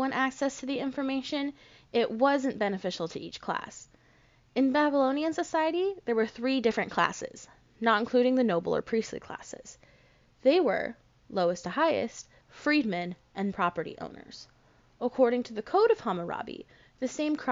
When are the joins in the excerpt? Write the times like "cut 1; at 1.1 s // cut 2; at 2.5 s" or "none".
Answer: cut 1; at 12.4 s // cut 2; at 13.5 s